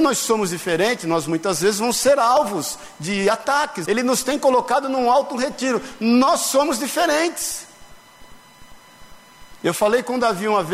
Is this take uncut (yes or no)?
no